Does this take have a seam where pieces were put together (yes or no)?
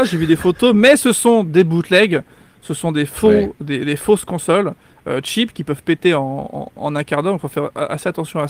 no